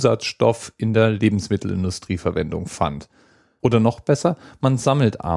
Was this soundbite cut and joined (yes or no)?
yes